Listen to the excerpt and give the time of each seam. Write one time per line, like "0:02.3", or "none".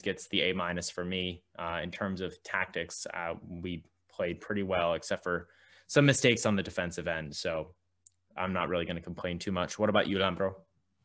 none